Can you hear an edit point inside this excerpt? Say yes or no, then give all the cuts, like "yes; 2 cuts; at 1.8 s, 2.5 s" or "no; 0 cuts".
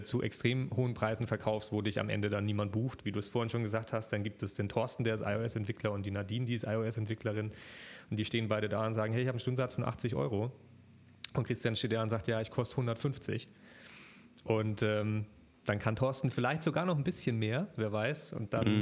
yes; 1 cut; at 3.0 s